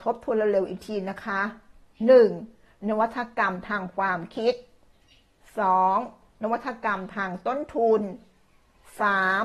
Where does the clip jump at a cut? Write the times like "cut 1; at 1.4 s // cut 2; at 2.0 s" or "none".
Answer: none